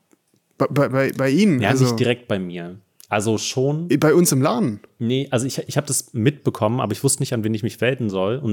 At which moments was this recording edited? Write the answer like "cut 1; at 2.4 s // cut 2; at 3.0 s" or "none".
none